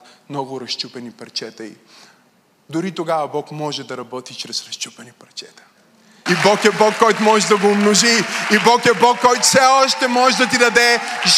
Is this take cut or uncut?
cut